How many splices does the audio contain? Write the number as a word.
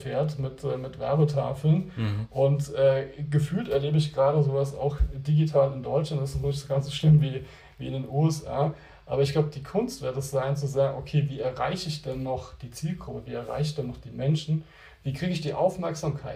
zero